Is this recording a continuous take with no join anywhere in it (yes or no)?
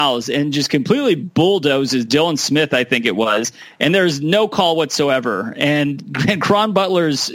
yes